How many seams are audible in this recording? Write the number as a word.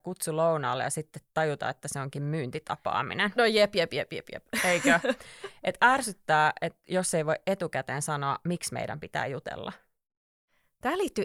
zero